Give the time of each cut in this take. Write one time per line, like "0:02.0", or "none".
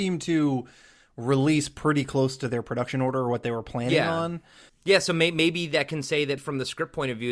0:04.7
0:06.4